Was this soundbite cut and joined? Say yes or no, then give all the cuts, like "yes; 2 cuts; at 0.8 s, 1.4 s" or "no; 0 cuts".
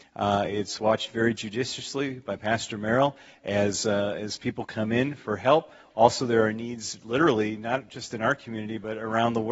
no; 0 cuts